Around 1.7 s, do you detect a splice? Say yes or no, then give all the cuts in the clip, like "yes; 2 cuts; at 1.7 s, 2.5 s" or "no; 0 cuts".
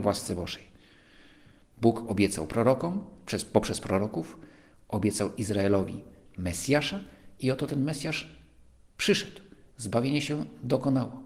yes; 1 cut; at 1.7 s